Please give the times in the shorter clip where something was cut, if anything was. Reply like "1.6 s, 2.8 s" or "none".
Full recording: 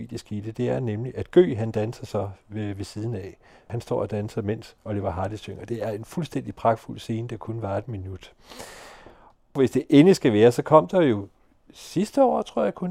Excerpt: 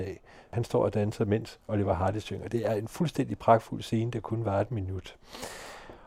none